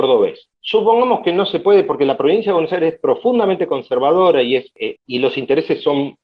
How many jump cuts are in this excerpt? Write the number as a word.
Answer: one